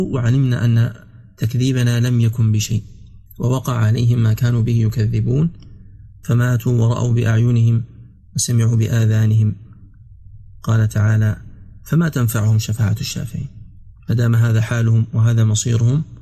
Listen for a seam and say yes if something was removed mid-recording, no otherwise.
yes